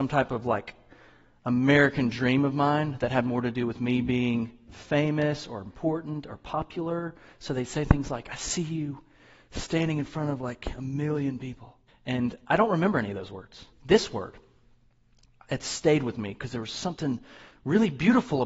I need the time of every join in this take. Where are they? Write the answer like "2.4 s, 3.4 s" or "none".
11.9 s, 13.7 s